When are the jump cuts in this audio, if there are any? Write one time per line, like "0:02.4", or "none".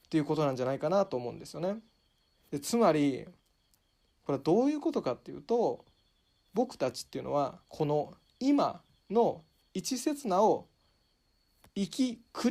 0:02.4
0:07.6